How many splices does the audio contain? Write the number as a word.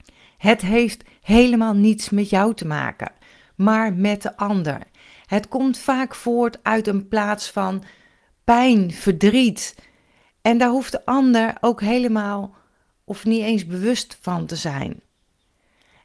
zero